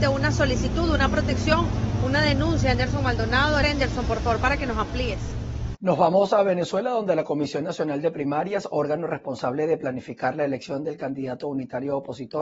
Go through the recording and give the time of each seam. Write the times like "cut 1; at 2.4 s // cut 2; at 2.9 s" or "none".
cut 1; at 3.6 s // cut 2; at 5.7 s